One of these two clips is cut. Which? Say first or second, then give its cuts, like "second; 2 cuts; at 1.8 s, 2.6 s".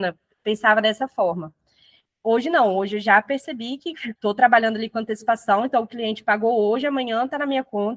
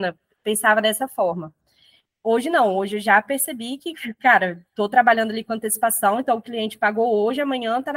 first; 1 cut; at 4.2 s